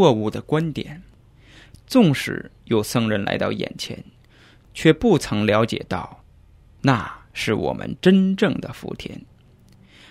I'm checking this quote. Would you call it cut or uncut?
uncut